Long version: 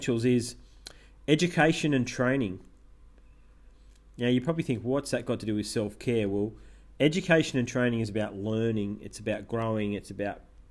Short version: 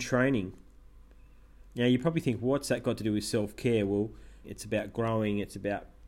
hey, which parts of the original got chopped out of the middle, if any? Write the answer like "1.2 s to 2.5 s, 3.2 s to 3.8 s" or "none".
3.7 s to 4.1 s, 6.9 s to 9.0 s